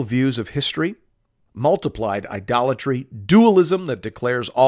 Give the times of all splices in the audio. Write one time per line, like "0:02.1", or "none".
0:01.5